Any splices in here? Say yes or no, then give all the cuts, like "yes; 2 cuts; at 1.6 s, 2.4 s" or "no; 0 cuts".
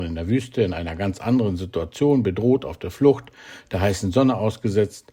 no; 0 cuts